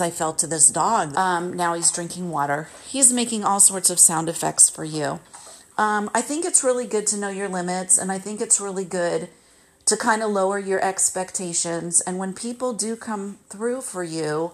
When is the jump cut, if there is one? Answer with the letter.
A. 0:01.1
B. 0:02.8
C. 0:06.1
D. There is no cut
A